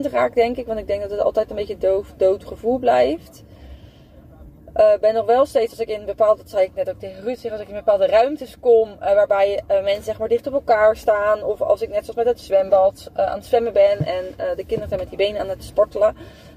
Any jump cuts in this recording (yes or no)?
no